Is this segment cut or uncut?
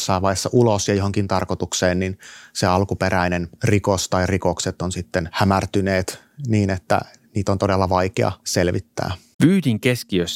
cut